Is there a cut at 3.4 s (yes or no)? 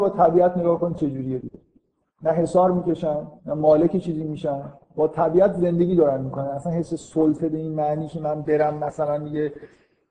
yes